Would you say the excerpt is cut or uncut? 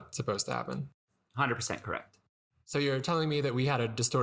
uncut